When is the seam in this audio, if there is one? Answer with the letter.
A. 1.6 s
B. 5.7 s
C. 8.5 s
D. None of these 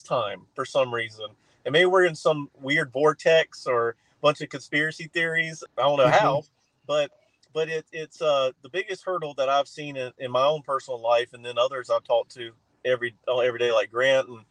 B